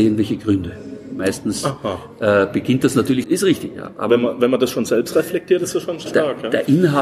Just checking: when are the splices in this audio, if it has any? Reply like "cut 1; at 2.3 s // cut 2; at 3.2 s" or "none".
cut 1; at 3.2 s // cut 2; at 6.1 s